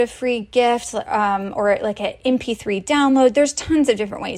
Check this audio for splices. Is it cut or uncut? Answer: uncut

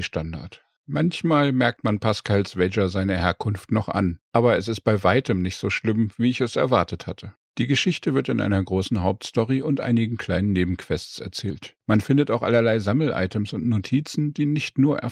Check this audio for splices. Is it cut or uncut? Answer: cut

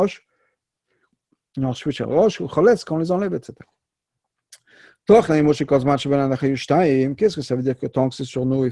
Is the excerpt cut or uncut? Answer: uncut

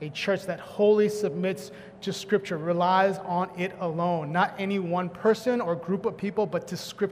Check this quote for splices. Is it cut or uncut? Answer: uncut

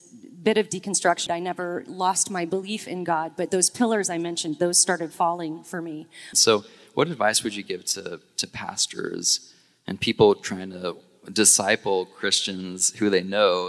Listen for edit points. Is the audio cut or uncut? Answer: cut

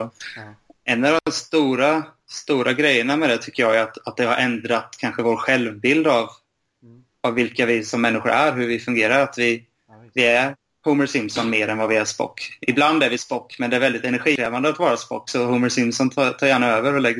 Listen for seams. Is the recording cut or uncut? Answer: uncut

